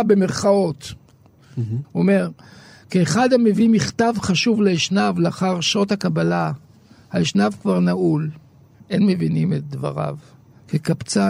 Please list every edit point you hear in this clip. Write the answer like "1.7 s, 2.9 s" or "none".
1.8 s, 8.7 s